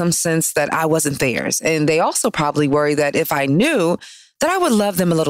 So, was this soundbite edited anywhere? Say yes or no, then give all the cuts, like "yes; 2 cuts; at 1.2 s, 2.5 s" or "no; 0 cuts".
no; 0 cuts